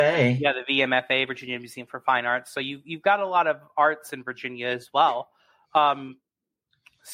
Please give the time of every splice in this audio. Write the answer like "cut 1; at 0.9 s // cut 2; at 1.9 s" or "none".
none